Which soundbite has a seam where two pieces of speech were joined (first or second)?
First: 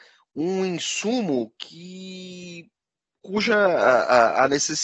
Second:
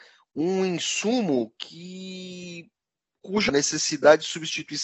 second